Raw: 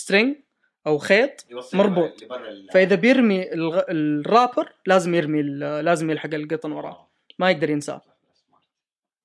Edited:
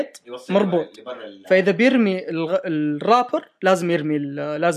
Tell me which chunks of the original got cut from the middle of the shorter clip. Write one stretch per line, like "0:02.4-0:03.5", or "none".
none

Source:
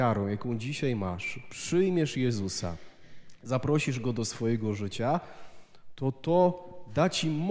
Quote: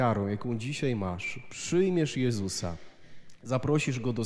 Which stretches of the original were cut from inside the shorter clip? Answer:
none

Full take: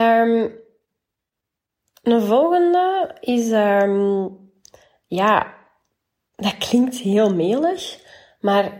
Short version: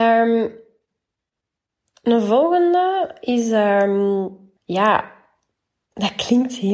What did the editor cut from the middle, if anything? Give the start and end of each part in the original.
0:04.6-0:05.0

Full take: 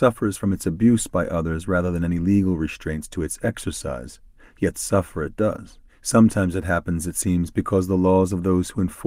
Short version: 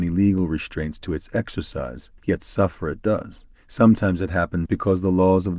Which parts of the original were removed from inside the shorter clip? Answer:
0:04.3-0:04.5
0:07.0-0:07.5

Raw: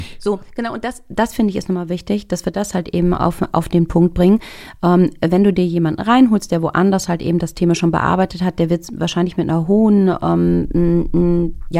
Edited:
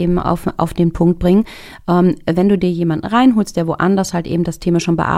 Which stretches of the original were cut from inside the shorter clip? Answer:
none

